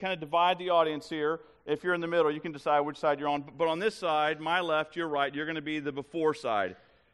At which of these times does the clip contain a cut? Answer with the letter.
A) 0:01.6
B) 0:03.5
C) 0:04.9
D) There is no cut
D